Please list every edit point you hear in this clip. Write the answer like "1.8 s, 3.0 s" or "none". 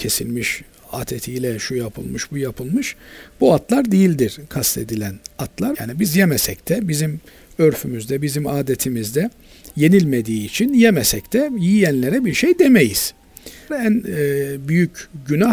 5.7 s, 13.7 s

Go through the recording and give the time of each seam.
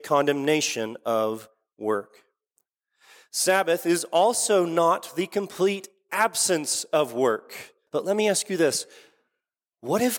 7.9 s

